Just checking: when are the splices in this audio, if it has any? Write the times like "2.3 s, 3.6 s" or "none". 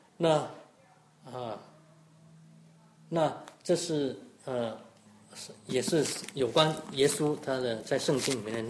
none